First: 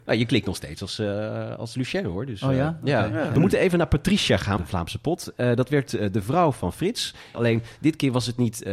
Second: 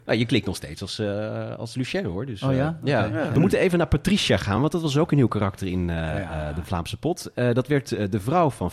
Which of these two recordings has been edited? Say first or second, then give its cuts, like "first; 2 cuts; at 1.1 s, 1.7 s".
first; 2 cuts; at 4.6 s, 7.3 s